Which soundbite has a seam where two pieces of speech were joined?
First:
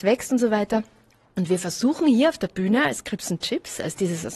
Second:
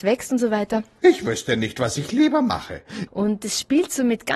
second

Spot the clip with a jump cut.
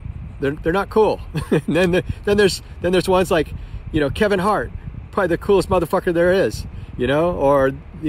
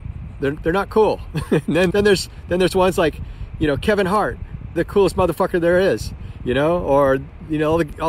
second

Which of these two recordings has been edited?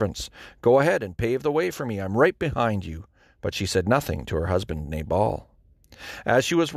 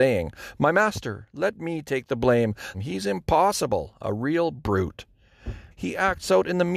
second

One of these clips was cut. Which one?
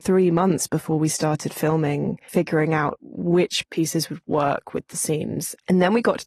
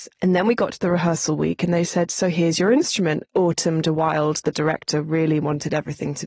second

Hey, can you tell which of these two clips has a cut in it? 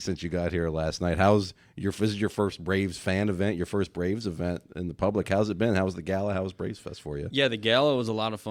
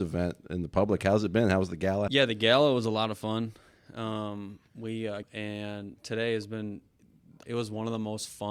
second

